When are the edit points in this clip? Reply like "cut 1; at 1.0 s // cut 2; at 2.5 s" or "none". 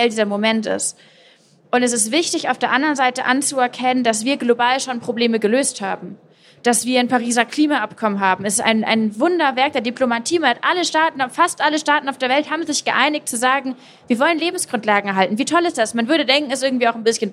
none